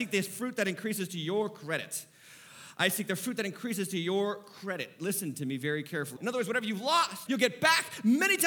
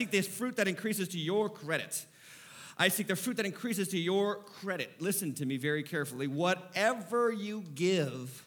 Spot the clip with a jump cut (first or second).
first